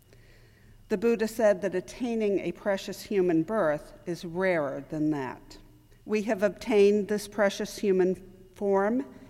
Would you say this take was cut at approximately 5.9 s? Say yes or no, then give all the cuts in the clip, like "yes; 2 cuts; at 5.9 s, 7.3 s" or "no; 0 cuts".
yes; 1 cut; at 5.9 s